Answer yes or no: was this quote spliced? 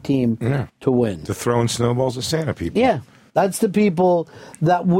no